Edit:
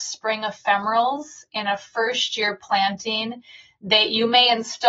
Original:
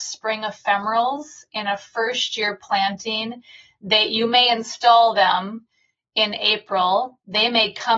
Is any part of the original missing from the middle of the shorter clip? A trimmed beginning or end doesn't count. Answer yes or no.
no